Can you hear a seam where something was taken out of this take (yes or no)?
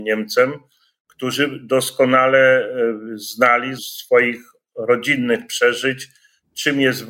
yes